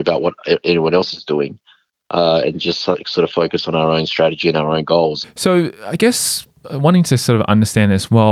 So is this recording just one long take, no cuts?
no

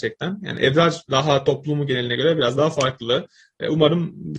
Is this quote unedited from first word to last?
no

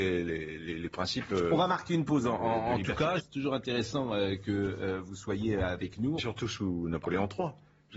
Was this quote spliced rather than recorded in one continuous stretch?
yes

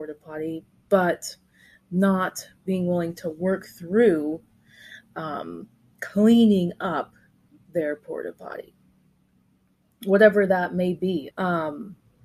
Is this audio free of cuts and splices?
no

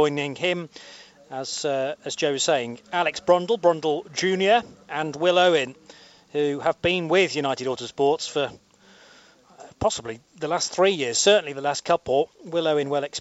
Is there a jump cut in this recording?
yes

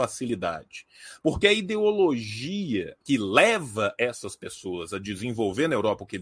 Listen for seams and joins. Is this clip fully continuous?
no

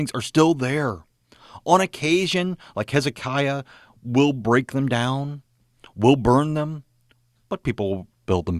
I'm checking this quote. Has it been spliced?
no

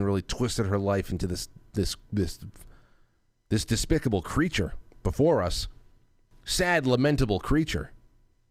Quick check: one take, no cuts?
yes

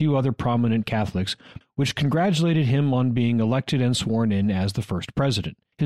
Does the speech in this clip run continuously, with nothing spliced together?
no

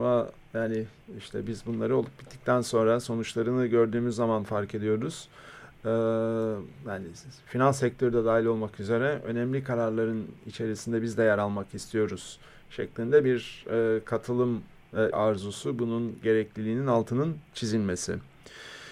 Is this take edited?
yes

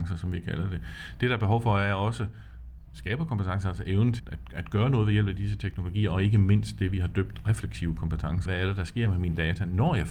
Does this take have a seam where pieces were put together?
yes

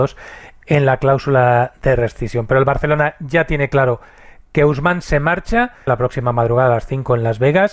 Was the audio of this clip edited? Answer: yes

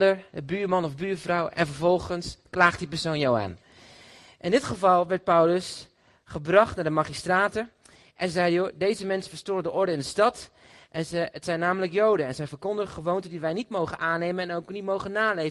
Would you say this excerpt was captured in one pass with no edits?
yes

